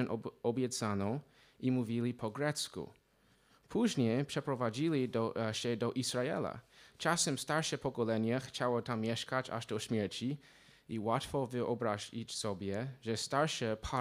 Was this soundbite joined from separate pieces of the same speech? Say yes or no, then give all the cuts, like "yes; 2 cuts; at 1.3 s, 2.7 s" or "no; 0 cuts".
no; 0 cuts